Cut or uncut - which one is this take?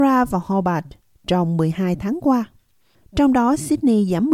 cut